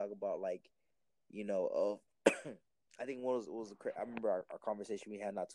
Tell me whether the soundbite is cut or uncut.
uncut